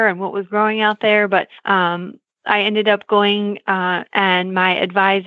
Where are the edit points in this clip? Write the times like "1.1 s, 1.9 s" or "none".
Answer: 1.6 s, 4.1 s